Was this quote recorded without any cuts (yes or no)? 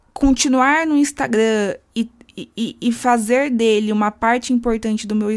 yes